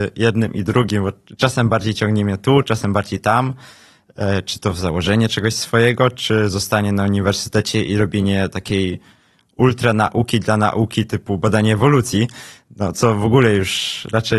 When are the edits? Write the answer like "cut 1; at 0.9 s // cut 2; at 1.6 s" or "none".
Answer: none